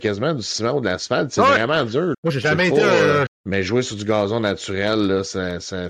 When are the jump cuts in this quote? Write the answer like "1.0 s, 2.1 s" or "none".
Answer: 2.1 s, 3.3 s